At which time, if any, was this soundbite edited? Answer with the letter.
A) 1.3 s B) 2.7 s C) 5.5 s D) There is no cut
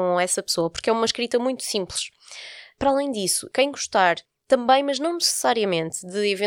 D